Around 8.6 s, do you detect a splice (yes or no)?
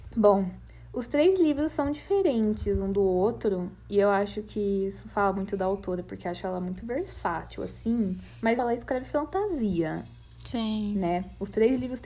yes